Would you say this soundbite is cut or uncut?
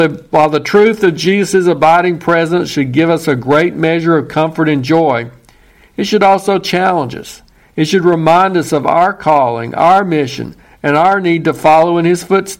uncut